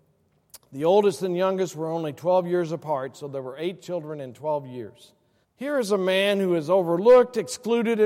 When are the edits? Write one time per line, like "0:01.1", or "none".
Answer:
0:05.4